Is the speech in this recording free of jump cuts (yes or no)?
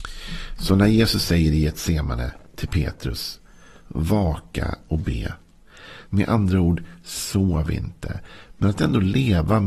no